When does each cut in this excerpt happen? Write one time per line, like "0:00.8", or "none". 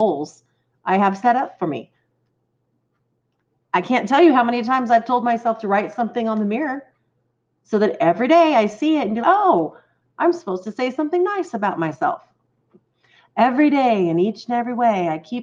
0:09.2